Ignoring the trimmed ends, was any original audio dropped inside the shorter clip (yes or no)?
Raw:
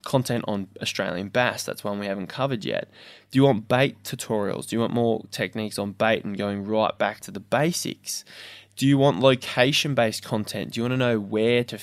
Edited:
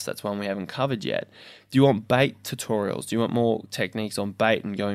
no